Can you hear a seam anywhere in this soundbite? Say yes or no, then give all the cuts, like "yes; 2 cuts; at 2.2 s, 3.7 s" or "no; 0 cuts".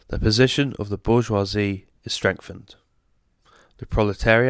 no; 0 cuts